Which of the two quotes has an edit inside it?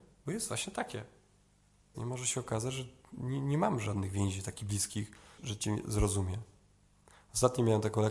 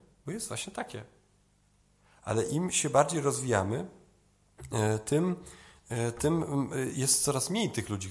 first; 3 cuts; at 1.9 s, 3.1 s, 5.4 s

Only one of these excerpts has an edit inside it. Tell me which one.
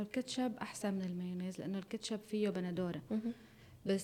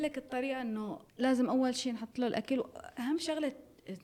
second; 1 cut; at 1.1 s

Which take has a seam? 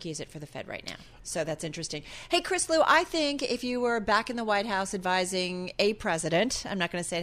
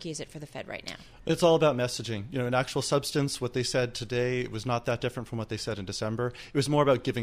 first; 1 cut; at 1.2 s

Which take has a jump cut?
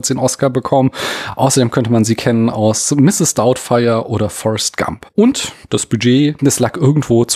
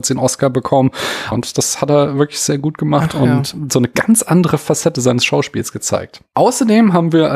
second; 1 cut; at 1.3 s

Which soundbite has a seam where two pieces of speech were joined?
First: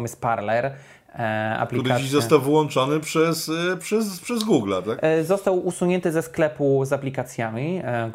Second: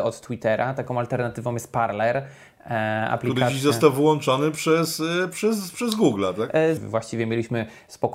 second; 1 cut; at 6.8 s

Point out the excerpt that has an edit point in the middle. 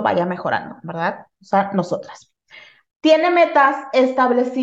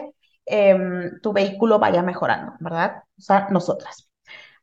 first; 1 cut; at 2.9 s

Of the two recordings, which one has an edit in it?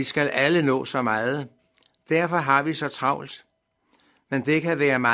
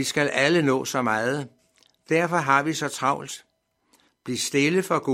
second; 1 cut; at 4.1 s

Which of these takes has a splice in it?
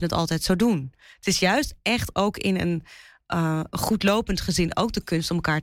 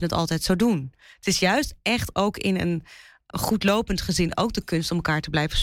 second; 1 cut; at 3.3 s

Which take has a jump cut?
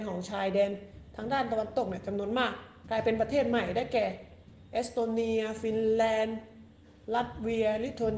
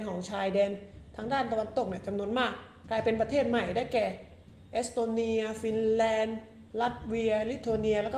second; 1 cut; at 6.7 s

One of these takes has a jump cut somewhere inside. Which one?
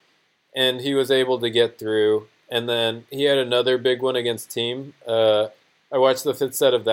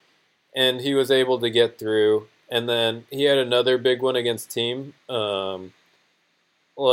second; 1 cut; at 5.0 s

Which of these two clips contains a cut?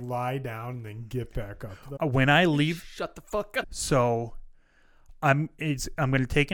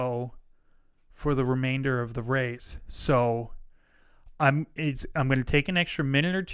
first; 2 cuts; at 2.0 s, 3.6 s

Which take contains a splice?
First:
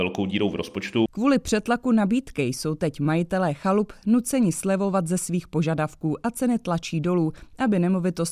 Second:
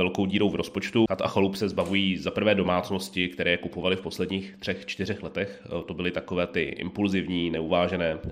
second; 1 cut; at 1.1 s

